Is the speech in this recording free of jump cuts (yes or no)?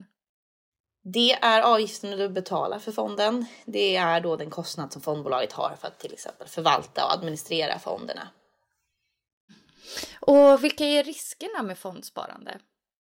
yes